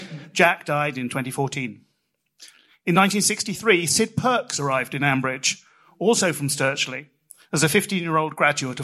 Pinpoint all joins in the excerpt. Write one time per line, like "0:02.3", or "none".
none